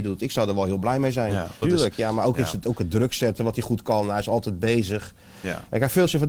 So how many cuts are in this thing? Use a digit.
1